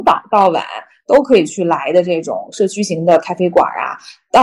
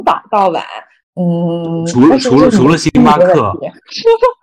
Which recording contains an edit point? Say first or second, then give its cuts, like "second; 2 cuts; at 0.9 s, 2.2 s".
second; 1 cut; at 1.0 s